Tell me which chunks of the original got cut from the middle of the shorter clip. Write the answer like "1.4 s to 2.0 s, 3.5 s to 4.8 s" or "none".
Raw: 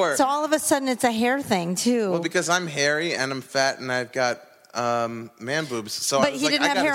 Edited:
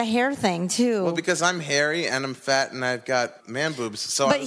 4.5 s to 5.3 s